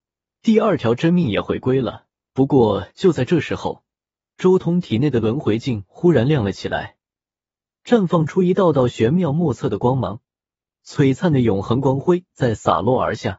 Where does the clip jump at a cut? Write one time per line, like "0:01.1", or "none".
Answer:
0:02.3
0:10.7